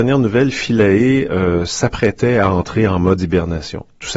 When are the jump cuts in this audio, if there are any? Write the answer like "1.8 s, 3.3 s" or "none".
none